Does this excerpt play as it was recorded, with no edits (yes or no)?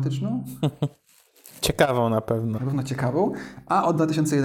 no